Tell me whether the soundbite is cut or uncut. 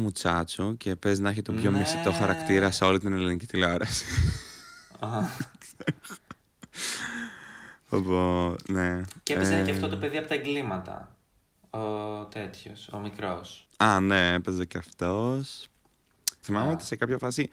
cut